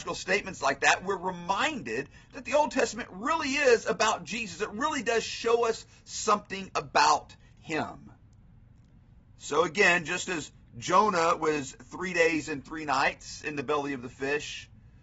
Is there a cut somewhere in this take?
no; 0 cuts

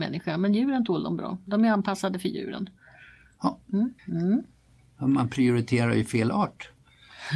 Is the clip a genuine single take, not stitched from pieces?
no; 1 cut; at 4.0 s

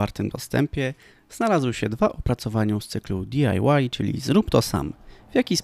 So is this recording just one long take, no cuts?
yes; 0 cuts

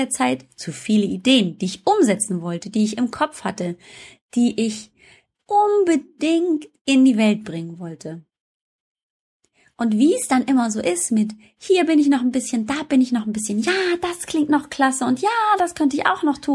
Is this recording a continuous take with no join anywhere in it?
yes; 0 cuts

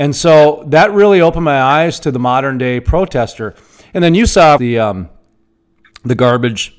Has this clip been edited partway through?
yes; 1 cut; at 4.6 s

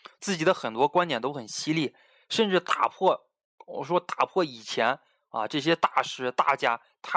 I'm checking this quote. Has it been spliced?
no; 0 cuts

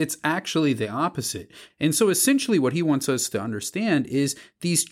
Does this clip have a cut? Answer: yes; 1 cut; at 1.7 s

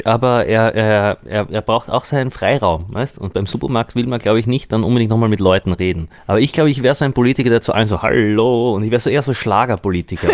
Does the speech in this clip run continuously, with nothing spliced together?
no; 1 cut; at 6.2 s

